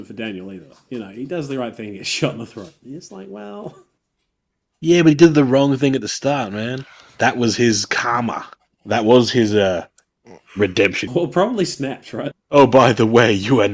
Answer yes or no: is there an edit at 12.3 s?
yes